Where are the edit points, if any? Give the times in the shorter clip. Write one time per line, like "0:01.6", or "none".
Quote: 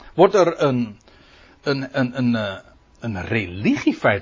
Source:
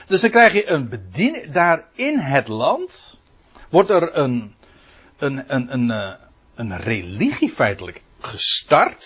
none

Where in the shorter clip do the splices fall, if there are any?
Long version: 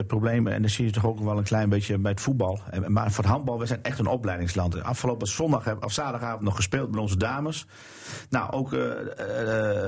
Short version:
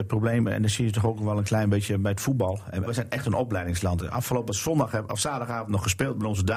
0:02.9

